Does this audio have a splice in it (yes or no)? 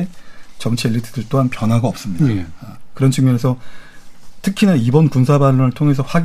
no